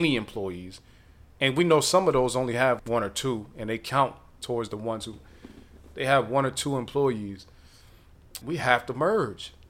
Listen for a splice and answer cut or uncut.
cut